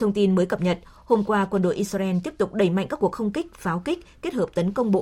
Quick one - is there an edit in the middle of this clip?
no; 0 cuts

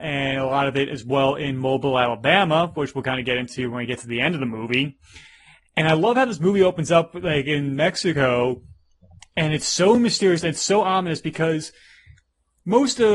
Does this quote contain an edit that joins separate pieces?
no; 0 cuts

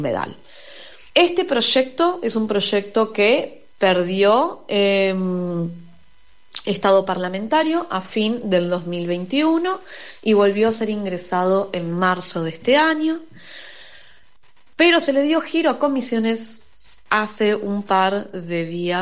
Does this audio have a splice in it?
yes; 1 cut; at 1.1 s

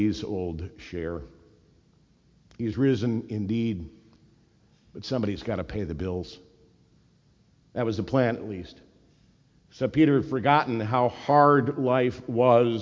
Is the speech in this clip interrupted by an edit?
no; 0 cuts

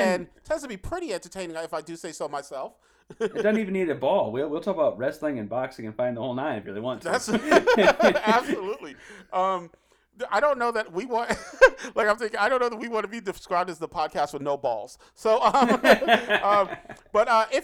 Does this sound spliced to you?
yes; 1 cut; at 12.2 s

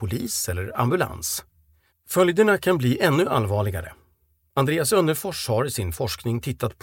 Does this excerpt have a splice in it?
yes; 1 cut; at 1.9 s

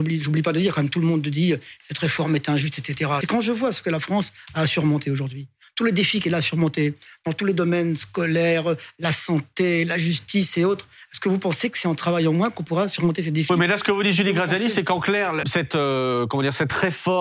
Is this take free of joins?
no; 2 cuts; at 3.2 s, 15.4 s

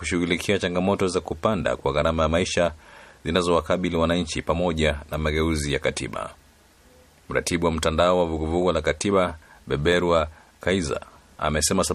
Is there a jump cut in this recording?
no; 0 cuts

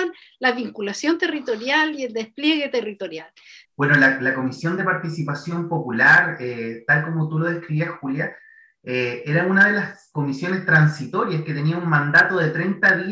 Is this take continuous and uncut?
no; 1 cut; at 3.6 s

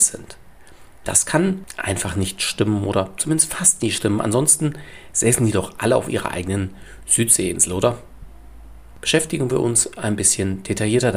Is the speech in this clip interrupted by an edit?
no; 0 cuts

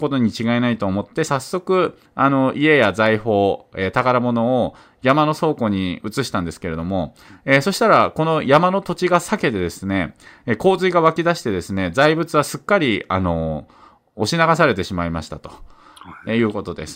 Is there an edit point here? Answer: no; 0 cuts

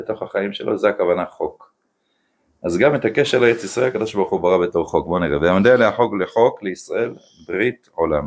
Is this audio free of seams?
yes; 0 cuts

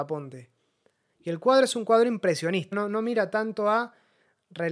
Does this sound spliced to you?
yes; 2 cuts; at 1.0 s, 2.7 s

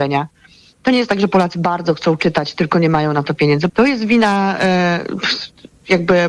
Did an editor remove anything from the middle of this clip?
yes; 1 cut; at 3.7 s

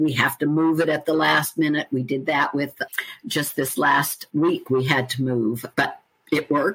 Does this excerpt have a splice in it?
no; 0 cuts

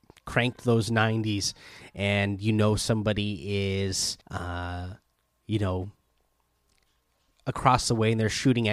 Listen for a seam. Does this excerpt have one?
yes; 1 cut; at 4.2 s

